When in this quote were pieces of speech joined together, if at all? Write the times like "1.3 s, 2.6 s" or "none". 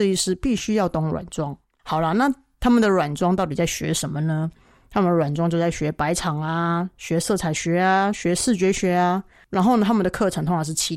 1.8 s